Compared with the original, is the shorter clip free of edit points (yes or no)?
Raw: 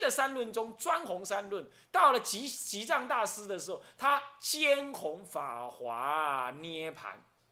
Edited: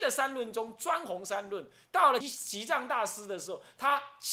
no